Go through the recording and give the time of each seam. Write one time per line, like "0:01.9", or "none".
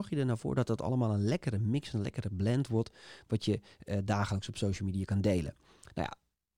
none